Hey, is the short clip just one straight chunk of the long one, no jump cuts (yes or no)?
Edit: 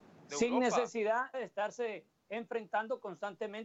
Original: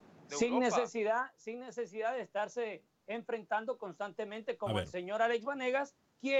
no